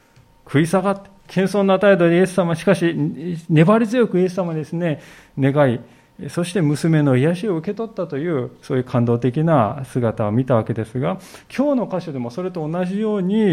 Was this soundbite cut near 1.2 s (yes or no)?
yes